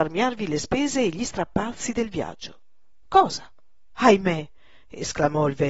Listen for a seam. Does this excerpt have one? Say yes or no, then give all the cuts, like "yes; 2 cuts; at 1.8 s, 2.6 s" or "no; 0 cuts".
yes; 1 cut; at 3.9 s